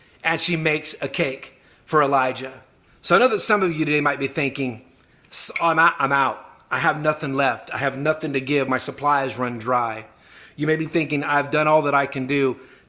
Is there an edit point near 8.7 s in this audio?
yes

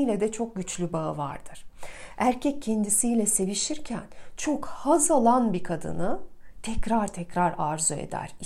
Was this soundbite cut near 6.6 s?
no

